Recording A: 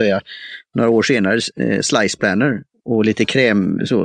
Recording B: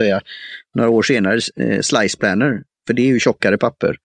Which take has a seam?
A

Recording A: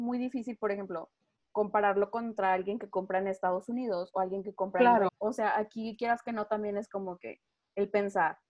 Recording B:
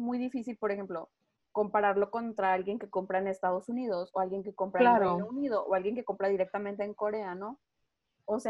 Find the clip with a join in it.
A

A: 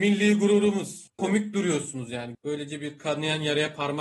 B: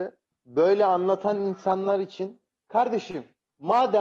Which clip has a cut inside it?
A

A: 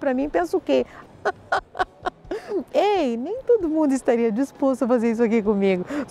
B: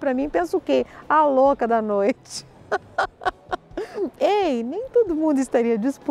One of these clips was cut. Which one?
A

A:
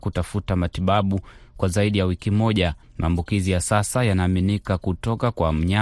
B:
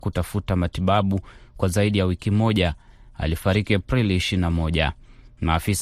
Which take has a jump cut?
A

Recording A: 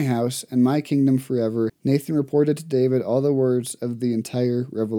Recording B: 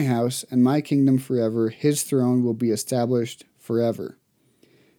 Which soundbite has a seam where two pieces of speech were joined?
A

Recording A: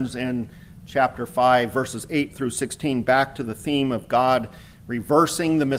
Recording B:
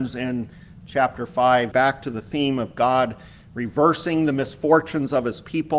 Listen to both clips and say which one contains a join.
B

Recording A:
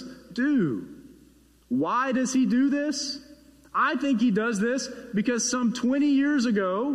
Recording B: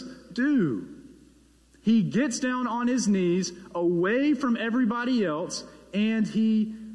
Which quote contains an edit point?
A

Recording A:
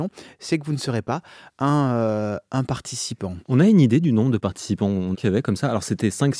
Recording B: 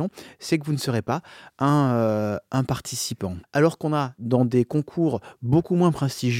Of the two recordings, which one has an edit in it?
B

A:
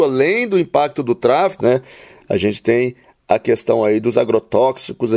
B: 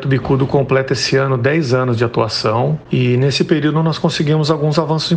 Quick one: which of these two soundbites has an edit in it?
A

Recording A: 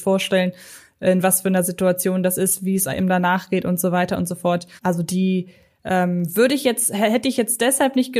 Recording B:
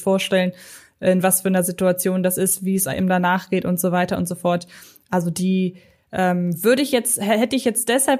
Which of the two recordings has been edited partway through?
A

